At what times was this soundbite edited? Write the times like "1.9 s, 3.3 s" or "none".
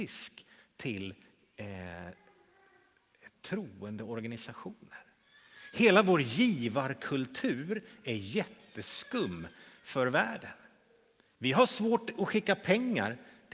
3.3 s